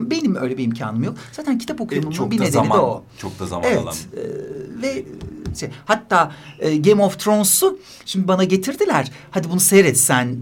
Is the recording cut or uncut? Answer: uncut